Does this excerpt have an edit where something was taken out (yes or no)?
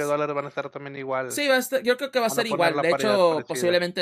no